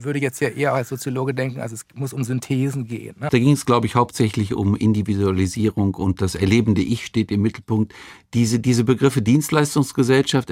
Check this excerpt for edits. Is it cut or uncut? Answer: cut